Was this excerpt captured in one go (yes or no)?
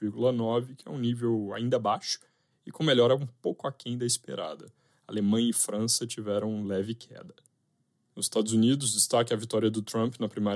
yes